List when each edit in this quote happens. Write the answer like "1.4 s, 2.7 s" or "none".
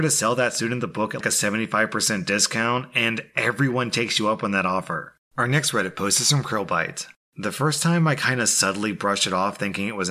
1.2 s, 5.3 s, 7.3 s

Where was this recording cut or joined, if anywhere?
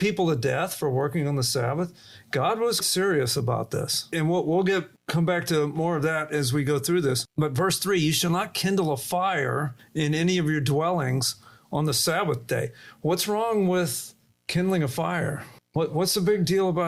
2.8 s

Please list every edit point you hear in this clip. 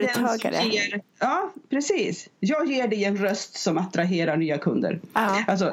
1.1 s, 2.4 s

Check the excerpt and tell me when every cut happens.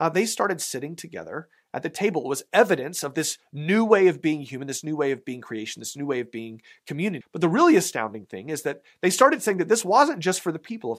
7.2 s

